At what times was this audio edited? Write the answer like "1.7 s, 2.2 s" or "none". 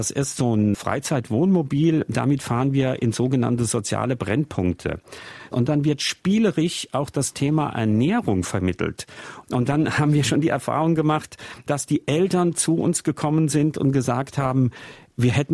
5.5 s, 9.4 s